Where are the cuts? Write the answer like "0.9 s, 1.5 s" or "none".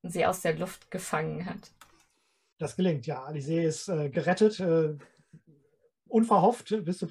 2.5 s